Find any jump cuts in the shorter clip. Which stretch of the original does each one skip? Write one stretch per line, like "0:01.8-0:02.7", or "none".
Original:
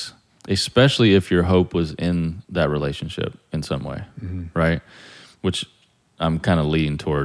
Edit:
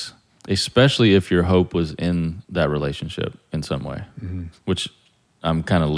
0:04.5-0:05.3